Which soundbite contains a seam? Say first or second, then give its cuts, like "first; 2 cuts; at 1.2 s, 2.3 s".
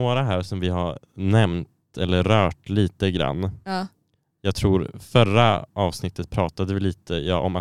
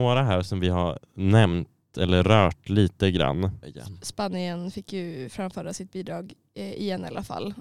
second; 1 cut; at 3.6 s